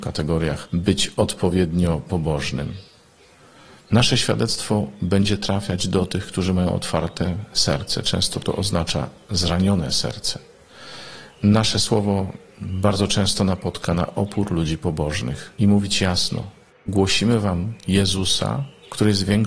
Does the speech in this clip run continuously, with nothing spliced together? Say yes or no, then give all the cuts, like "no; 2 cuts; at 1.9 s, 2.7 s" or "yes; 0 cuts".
yes; 0 cuts